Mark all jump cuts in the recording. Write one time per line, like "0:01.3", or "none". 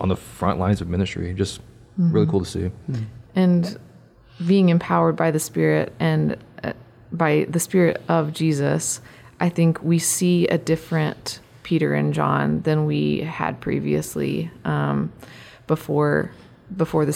none